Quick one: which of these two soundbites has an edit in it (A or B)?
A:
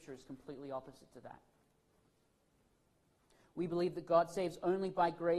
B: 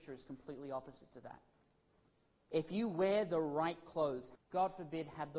B